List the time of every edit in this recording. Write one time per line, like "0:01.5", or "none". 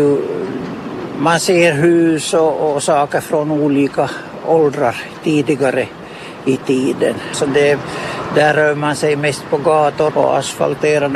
0:07.3
0:10.1